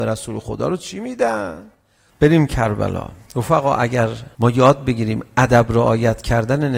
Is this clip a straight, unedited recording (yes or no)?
no